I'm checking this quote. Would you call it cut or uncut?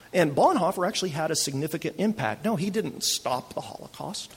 uncut